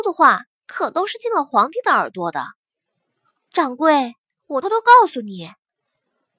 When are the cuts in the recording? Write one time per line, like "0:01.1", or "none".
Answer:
0:03.5
0:04.6